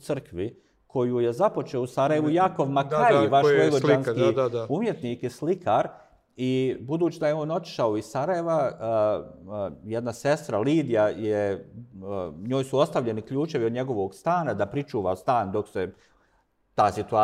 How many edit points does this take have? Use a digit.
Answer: 0